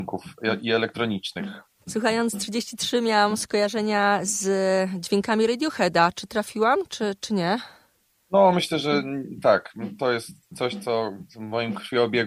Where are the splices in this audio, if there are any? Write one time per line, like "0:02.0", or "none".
0:01.8